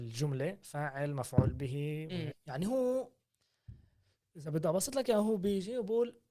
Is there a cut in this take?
yes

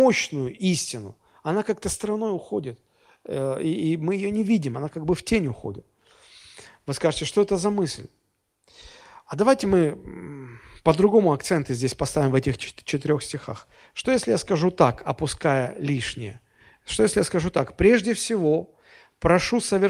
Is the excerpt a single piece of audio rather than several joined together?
yes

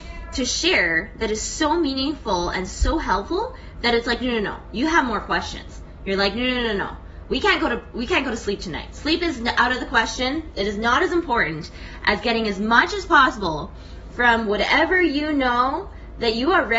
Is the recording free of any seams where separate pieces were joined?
yes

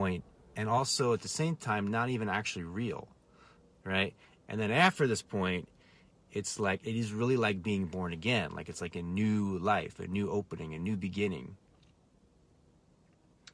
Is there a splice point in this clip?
no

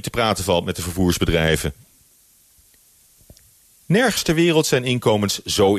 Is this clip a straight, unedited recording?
yes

